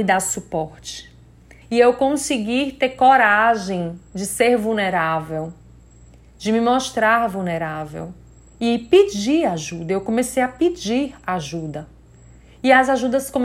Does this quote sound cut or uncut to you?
cut